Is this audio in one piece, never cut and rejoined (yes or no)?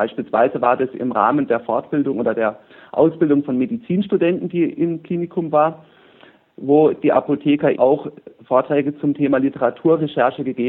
no